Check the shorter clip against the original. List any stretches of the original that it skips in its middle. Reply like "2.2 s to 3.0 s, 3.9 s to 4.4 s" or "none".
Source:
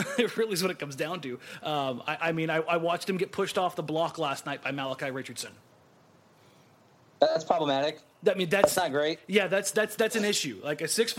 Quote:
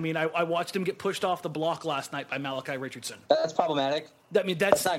5.6 s to 7.2 s

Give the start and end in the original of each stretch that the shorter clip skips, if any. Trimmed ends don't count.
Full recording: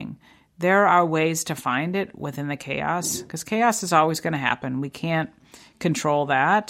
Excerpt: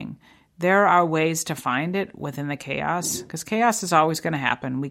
none

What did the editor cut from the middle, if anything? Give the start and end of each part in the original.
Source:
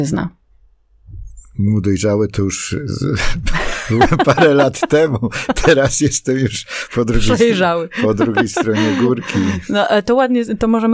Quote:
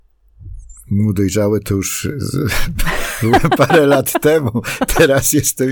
none

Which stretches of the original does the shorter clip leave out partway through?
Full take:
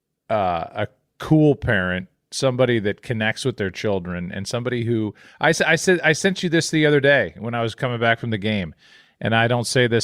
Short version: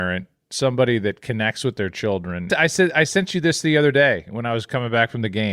4.3 s to 5.6 s

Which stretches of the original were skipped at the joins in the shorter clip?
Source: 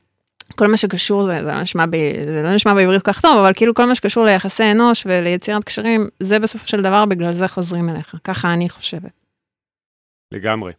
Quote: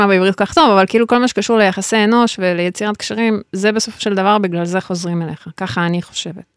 none

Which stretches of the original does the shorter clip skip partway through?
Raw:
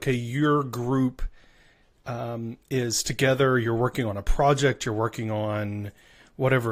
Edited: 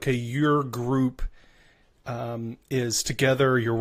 none

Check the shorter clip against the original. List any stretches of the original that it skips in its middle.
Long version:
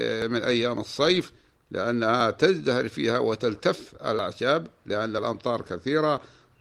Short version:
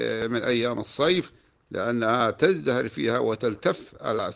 none

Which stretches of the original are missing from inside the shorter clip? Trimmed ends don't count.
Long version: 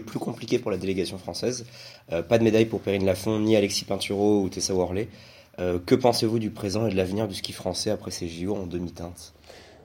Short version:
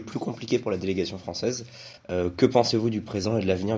2.0 s to 5.5 s

